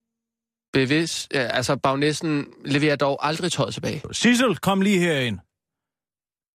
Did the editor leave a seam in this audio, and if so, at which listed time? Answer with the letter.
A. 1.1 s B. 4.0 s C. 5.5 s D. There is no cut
B